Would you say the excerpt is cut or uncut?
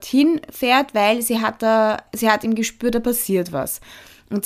cut